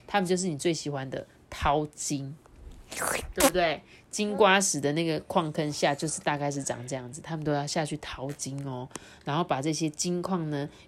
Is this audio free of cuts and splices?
yes; 0 cuts

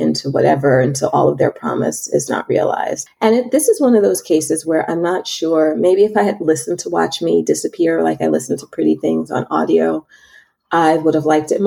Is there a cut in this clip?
yes; 1 cut; at 3.1 s

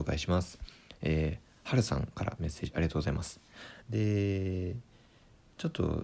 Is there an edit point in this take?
yes; 1 cut; at 3.8 s

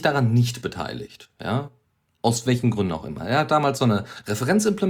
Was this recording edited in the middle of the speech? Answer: no; 0 cuts

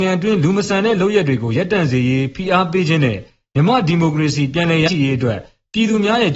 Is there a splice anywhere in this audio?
yes; 1 cut; at 4.9 s

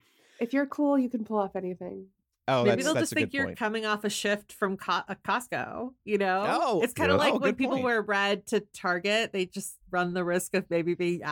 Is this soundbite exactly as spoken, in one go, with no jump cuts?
yes; 0 cuts

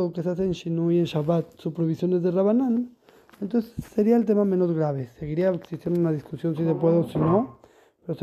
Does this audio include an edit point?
no; 0 cuts

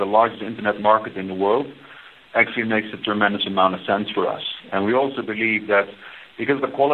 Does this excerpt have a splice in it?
no; 0 cuts

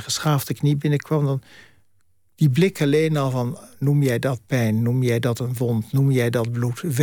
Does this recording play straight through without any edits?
yes; 0 cuts

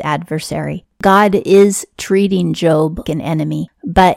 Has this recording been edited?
yes; 1 cut; at 3.0 s

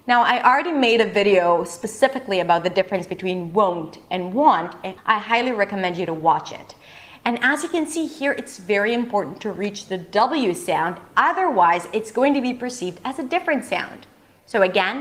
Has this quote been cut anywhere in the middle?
yes; 1 cut; at 5.0 s

